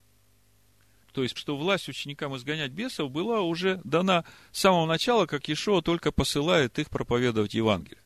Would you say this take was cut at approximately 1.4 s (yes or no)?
yes